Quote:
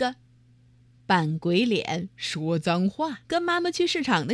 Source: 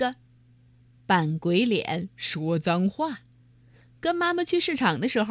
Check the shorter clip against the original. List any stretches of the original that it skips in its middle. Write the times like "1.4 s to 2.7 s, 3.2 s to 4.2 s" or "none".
3.2 s to 4.0 s

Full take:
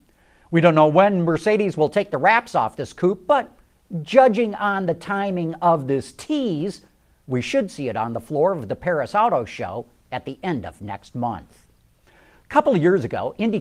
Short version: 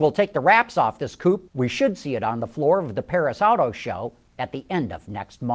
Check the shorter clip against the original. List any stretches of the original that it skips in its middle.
3.3 s to 7.2 s

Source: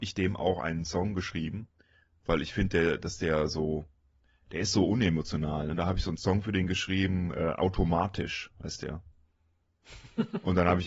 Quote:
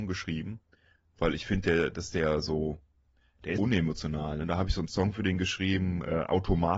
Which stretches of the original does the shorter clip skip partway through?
4.6 s to 4.9 s

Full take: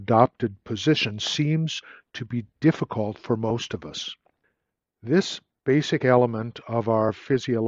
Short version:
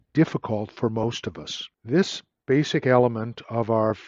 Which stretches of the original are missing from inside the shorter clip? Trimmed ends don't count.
4.2 s to 4.9 s

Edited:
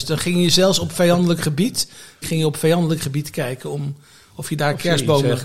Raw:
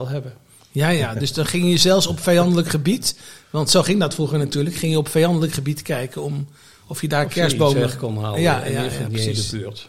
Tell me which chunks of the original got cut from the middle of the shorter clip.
3.5 s to 4.7 s

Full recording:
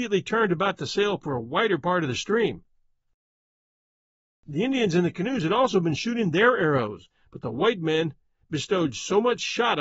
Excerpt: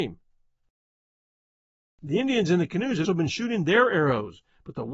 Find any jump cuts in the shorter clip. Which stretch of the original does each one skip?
5.5 s to 5.7 s

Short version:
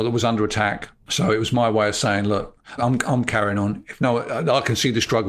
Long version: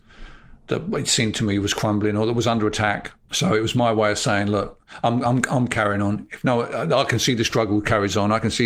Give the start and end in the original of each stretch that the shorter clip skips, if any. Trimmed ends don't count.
5.0 s to 5.2 s

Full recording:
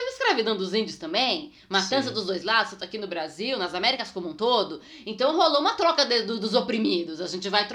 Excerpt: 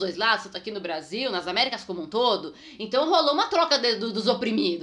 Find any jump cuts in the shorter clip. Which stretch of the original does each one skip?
none

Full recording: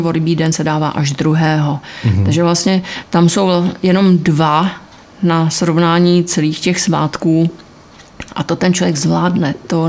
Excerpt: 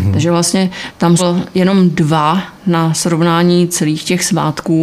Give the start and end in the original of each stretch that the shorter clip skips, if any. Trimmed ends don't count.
3.3 s to 3.5 s, 4.8 s to 5.1 s

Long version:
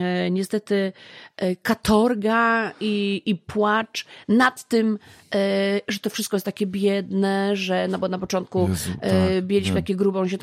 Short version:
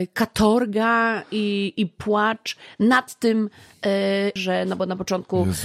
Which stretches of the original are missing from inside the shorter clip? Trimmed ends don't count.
5.8 s to 7.6 s

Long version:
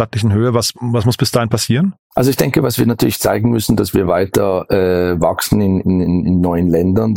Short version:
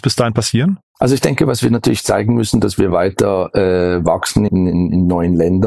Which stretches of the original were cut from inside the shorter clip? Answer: 5.6 s to 5.8 s

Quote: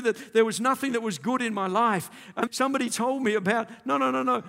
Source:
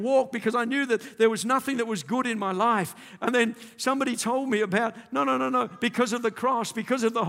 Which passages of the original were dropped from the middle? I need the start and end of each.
3.3 s to 3.7 s

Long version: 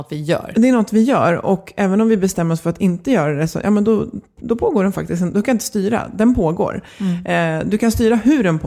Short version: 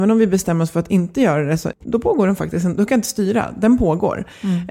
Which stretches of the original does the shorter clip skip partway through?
3.6 s to 4.3 s

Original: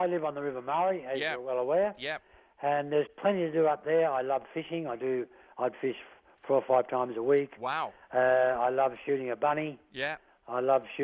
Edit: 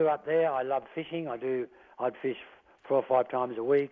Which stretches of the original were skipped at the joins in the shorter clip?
none

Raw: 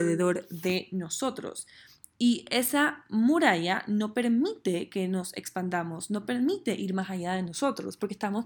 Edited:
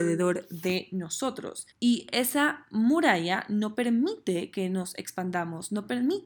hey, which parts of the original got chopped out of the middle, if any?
1.7 s to 2.1 s

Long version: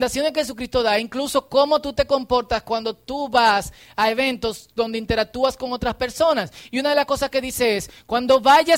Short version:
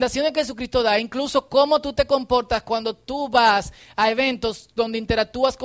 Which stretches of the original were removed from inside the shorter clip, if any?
none

